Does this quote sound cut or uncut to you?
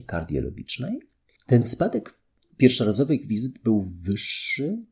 cut